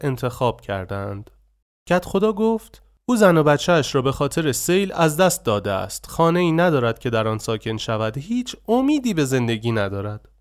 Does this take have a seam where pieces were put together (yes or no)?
yes